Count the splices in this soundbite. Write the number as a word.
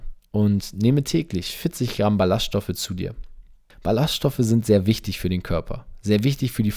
one